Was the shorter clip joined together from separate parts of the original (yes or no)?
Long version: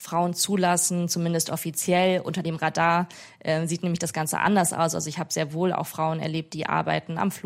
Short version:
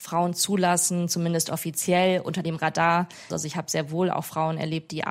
yes